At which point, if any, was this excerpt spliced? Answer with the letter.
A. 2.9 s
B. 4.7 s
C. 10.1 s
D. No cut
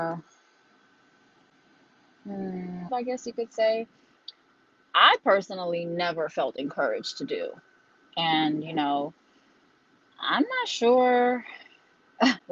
A